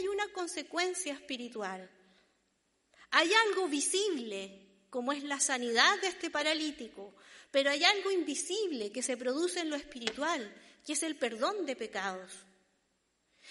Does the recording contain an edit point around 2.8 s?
no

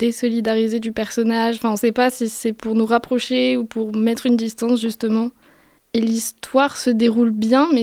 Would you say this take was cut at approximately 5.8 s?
yes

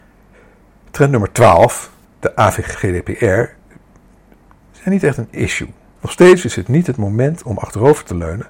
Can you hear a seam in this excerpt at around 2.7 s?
yes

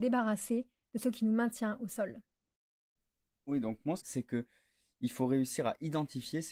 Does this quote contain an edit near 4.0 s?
yes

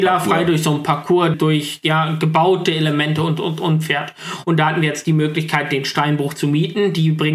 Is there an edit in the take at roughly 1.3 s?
yes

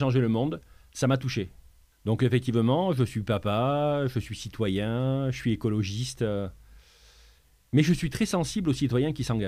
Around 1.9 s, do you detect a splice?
yes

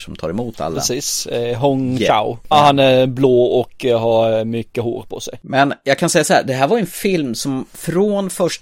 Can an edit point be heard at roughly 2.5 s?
yes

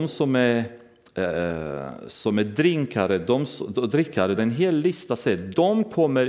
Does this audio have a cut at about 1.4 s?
no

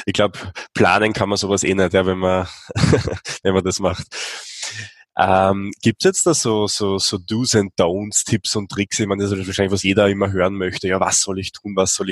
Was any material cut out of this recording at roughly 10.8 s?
no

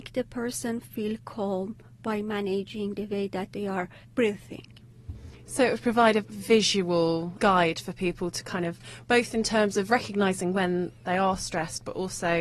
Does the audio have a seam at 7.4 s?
yes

